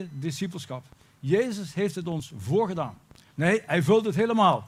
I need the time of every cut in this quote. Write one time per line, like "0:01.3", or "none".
0:03.3